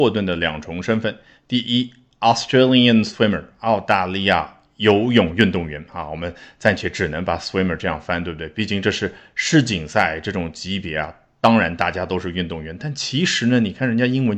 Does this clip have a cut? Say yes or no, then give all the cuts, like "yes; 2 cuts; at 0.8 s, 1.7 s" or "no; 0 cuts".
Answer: no; 0 cuts